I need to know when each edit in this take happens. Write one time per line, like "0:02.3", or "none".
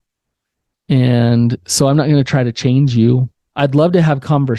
none